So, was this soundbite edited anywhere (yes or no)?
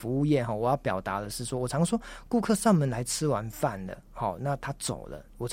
no